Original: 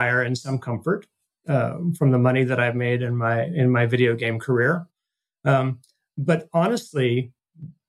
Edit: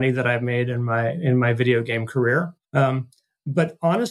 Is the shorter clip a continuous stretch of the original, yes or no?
no